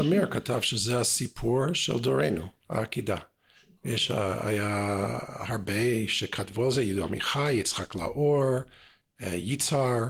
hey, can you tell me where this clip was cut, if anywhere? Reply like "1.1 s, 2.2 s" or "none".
none